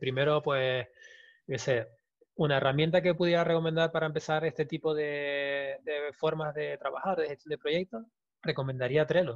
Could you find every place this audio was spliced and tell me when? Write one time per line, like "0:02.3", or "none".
none